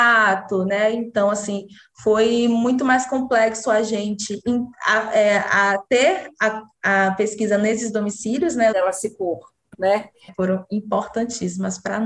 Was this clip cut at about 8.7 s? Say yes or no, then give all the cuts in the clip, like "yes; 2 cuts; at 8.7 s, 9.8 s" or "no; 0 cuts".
yes; 2 cuts; at 8.7 s, 10.3 s